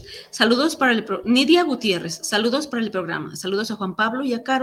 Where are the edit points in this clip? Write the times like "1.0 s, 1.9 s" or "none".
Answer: none